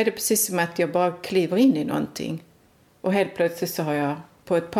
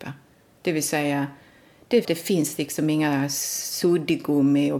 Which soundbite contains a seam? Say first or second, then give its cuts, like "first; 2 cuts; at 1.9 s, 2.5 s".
second; 1 cut; at 2.0 s